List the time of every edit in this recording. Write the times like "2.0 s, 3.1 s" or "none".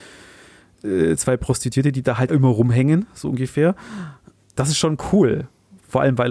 2.3 s